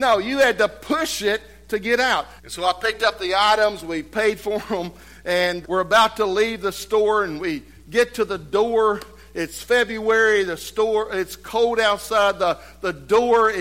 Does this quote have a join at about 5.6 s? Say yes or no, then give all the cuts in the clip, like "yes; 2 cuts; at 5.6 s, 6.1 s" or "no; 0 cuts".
yes; 2 cuts; at 2.4 s, 5.6 s